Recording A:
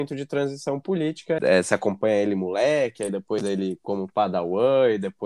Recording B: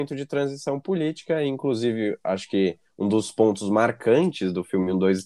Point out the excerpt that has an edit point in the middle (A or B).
A